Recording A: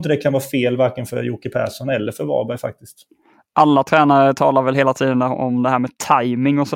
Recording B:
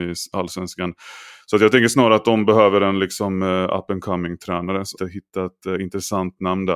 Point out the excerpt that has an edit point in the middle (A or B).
B